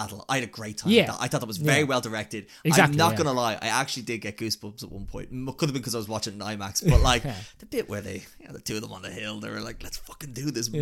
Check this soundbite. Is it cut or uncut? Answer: uncut